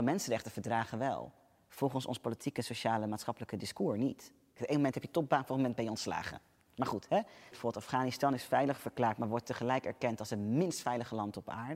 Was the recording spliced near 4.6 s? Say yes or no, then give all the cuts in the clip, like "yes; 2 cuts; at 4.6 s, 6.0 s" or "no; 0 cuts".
yes; 2 cuts; at 4.6 s, 7.5 s